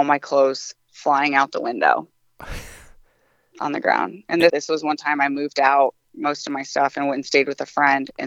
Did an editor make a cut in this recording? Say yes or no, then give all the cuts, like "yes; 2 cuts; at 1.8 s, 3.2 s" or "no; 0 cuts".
yes; 1 cut; at 4.5 s